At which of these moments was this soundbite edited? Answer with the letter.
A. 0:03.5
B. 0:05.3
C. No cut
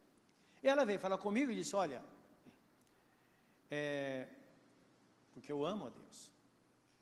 B